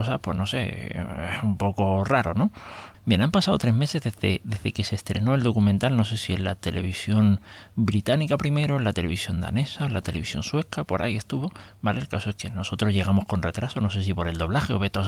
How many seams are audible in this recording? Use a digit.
1